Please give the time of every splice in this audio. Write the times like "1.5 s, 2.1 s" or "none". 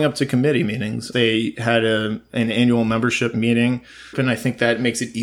1.1 s, 4.1 s